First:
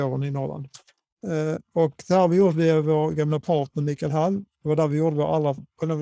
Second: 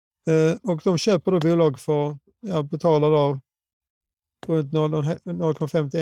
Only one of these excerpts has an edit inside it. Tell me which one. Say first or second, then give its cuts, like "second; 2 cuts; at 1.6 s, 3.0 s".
first; 1 cut; at 1.1 s